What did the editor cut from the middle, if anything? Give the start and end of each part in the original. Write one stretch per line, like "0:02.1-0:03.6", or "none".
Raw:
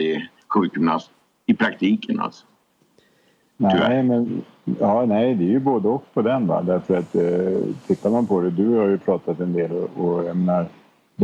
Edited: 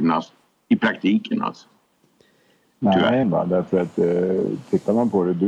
0:04.0-0:06.4